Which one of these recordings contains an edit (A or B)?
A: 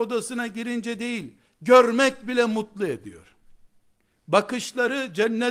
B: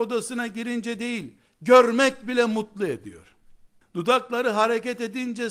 B